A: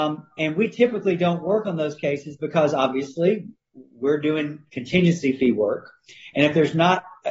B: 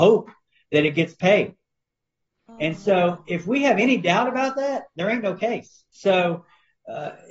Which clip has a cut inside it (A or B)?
B